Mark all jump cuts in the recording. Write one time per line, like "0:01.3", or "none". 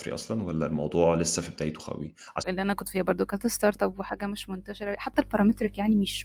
0:02.4